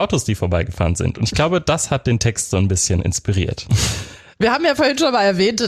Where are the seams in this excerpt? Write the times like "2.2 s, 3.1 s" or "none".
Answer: 3.7 s

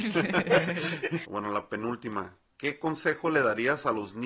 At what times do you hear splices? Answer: 1.2 s

